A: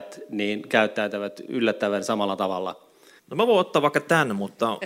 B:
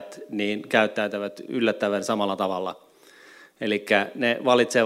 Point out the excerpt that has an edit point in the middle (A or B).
A